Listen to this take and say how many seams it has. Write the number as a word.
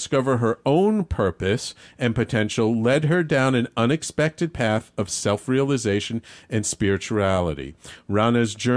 zero